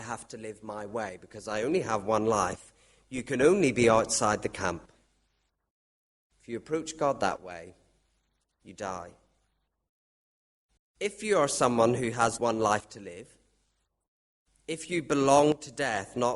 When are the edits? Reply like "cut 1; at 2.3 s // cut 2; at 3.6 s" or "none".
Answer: cut 1; at 10.8 s // cut 2; at 12.4 s